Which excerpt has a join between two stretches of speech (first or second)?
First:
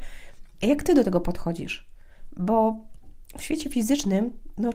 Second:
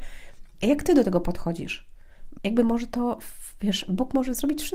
second